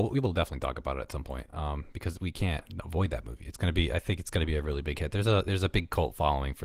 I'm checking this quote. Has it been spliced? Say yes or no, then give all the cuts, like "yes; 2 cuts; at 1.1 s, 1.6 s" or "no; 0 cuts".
no; 0 cuts